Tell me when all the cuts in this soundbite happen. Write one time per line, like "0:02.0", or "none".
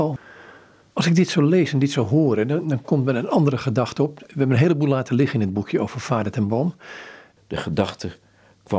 0:07.4